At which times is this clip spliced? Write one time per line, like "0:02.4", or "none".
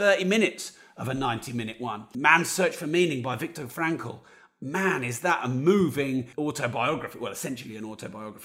0:02.1
0:06.3